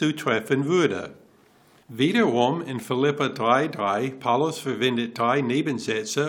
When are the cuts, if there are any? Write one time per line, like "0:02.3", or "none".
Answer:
none